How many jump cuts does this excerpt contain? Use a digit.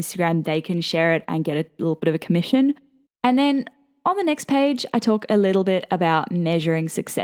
1